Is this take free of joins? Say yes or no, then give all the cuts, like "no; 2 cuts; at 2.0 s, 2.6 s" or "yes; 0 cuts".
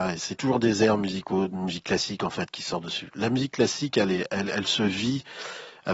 yes; 0 cuts